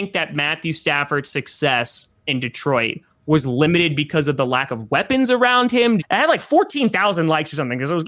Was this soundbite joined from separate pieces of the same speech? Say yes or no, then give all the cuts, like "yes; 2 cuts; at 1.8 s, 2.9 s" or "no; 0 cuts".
yes; 1 cut; at 6.0 s